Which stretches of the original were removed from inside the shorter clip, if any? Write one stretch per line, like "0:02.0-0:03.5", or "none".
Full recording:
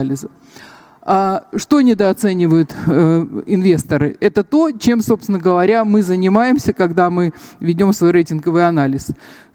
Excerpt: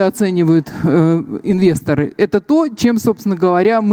none